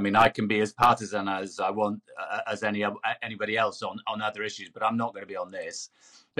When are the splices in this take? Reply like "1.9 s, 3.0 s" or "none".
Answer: none

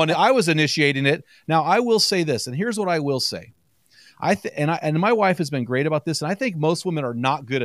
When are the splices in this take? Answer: 1.4 s

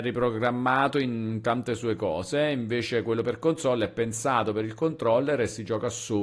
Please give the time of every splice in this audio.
none

